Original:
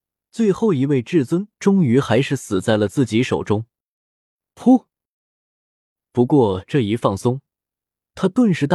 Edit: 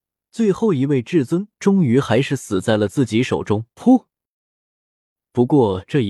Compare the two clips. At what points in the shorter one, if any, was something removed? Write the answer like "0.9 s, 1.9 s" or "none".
3.7 s